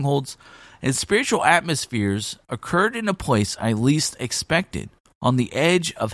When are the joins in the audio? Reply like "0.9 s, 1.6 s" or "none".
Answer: none

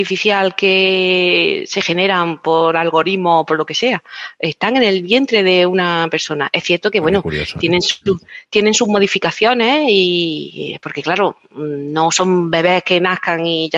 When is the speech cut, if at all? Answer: none

